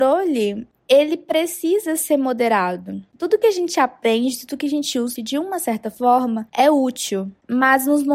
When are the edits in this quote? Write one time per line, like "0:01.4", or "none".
0:05.2